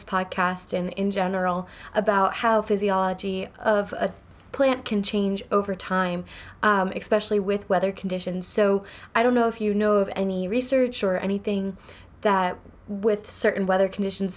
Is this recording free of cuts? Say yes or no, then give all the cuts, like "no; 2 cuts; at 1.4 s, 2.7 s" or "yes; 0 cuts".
yes; 0 cuts